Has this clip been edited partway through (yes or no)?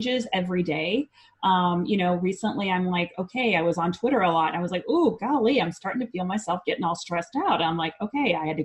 no